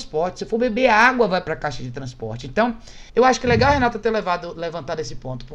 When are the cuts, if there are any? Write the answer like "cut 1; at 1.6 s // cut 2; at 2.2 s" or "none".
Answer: cut 1; at 3.1 s